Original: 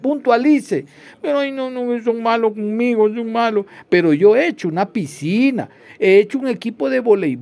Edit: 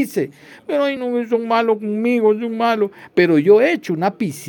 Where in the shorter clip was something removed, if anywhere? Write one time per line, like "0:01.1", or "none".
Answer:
0:01.0